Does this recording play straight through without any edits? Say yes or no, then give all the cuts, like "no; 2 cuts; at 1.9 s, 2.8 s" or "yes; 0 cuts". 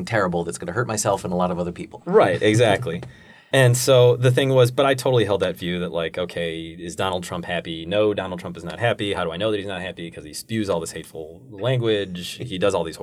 yes; 0 cuts